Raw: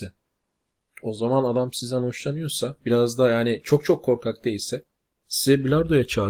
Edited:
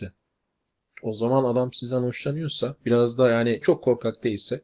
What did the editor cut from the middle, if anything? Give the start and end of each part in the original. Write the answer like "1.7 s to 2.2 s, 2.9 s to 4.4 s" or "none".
3.6 s to 3.8 s